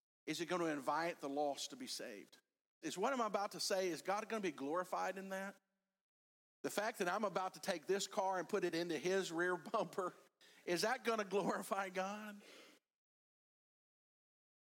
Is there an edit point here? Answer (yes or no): yes